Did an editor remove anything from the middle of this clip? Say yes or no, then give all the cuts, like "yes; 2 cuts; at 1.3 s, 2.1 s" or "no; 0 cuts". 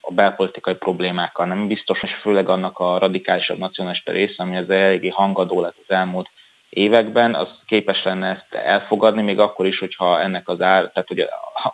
yes; 1 cut; at 2.0 s